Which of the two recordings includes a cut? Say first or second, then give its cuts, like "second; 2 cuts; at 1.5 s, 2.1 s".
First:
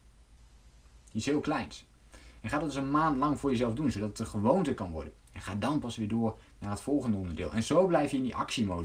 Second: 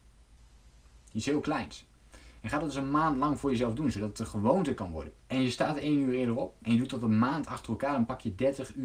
second; 1 cut; at 5.2 s